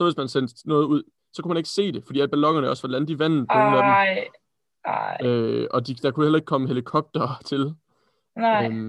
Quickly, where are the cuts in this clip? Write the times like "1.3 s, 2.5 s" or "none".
1.2 s

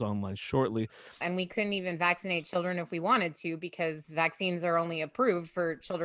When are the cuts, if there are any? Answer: 1.2 s

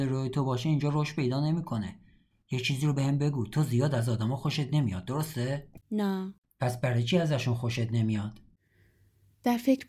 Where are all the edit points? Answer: 5.8 s

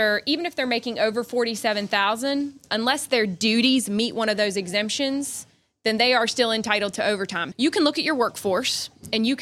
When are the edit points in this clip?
7.5 s

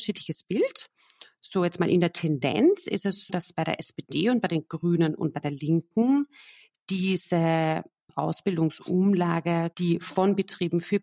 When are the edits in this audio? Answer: 3.3 s, 9.7 s

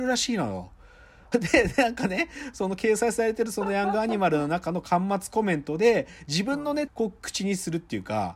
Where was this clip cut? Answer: 1.3 s, 6.9 s

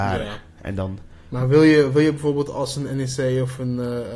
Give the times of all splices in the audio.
none

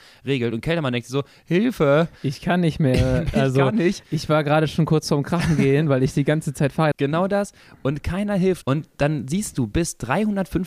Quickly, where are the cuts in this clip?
6.9 s, 8.6 s

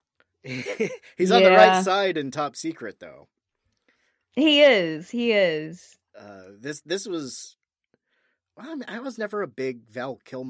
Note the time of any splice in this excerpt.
6.1 s

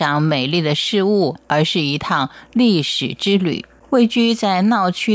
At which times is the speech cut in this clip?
3.8 s

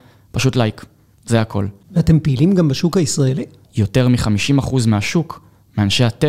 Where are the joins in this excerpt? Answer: 3.6 s

